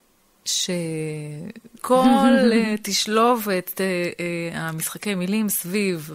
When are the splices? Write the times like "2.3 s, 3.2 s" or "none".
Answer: 1.8 s